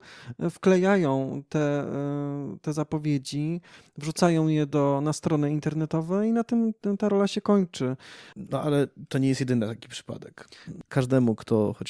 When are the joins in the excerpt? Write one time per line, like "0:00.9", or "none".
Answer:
0:08.3
0:10.9